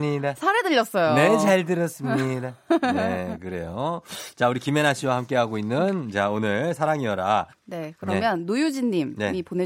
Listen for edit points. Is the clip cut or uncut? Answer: cut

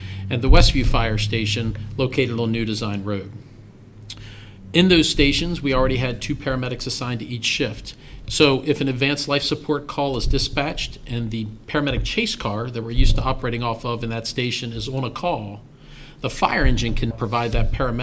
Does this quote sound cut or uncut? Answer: cut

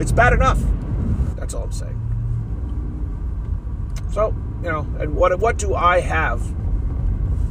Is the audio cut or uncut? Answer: cut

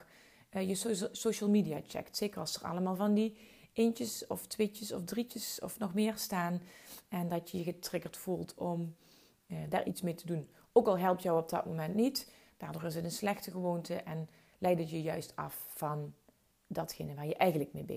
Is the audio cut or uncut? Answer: cut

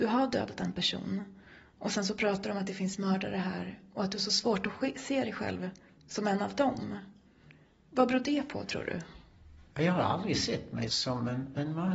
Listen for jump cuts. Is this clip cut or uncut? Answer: cut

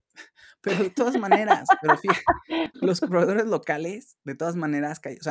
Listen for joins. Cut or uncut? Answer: cut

